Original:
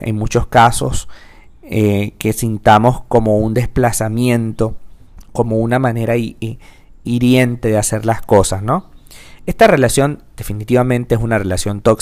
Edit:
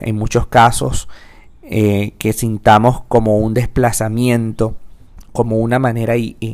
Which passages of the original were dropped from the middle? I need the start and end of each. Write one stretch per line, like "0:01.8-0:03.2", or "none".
none